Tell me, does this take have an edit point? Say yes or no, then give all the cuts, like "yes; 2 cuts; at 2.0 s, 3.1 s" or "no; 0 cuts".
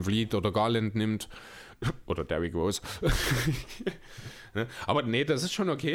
no; 0 cuts